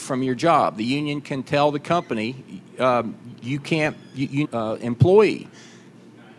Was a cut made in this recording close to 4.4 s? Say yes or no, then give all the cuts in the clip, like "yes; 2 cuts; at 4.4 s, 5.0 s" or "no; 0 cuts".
yes; 1 cut; at 4.4 s